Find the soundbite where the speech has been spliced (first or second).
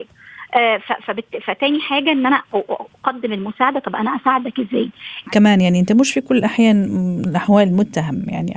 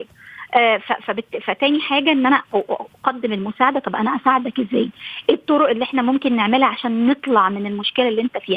first